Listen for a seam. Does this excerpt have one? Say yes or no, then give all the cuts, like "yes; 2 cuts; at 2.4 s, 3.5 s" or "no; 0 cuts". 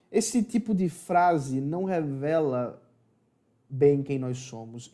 no; 0 cuts